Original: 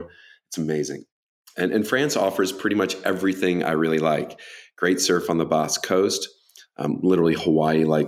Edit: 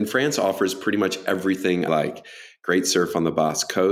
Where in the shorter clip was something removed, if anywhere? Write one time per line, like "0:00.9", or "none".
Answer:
0:01.9